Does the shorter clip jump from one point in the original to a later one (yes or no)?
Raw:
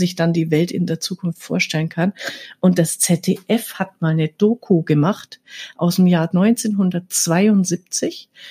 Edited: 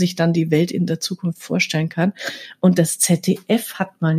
no